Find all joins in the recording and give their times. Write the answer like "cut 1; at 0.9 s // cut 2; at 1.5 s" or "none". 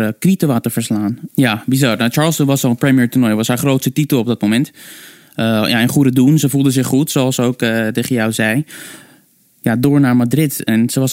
cut 1; at 1.3 s